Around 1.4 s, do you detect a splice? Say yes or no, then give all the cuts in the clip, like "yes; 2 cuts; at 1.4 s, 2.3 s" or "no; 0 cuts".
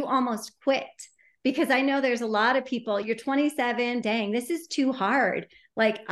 no; 2 cuts; at 3.0 s, 4.0 s